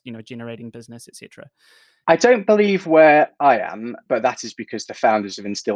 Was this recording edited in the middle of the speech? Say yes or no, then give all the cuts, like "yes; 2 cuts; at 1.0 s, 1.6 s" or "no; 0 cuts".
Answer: yes; 2 cuts; at 2.0 s, 4.1 s